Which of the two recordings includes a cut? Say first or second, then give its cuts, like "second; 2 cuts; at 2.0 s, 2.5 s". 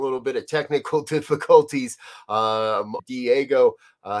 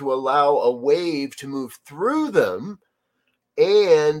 first; 1 cut; at 3.0 s